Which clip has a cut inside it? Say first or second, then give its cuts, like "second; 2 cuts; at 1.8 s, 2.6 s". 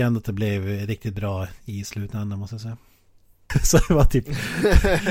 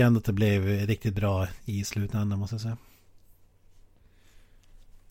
first; 1 cut; at 3.5 s